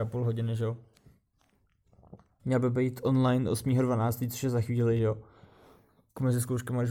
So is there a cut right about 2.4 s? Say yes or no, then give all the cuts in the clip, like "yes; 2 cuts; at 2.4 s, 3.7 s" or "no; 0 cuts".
yes; 1 cut; at 2.4 s